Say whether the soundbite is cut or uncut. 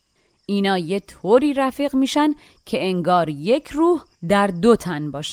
uncut